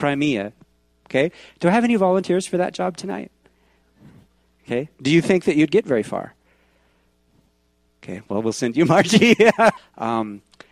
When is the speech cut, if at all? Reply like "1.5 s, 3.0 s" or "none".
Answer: 9.8 s